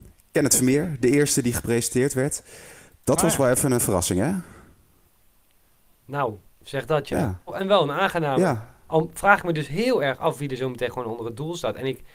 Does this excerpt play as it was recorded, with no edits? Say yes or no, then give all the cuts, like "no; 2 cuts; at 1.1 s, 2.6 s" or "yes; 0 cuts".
no; 1 cut; at 7.5 s